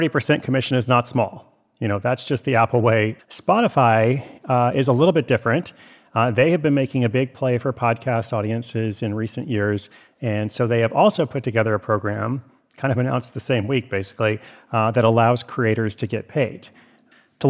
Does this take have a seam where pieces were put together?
yes; 1 cut; at 3.2 s

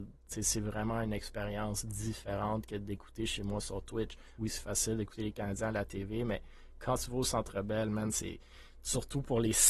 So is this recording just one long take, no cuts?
no; 1 cut; at 4.4 s

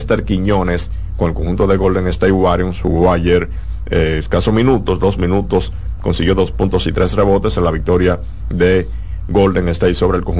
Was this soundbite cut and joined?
no; 0 cuts

